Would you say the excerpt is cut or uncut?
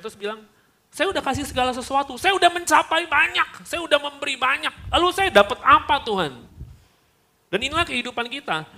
uncut